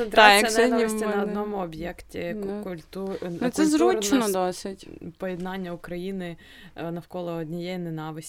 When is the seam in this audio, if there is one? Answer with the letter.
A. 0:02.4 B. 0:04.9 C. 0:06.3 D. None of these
D